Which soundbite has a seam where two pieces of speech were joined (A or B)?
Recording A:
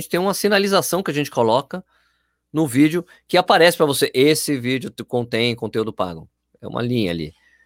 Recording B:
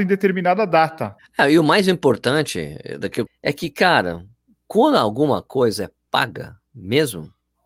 B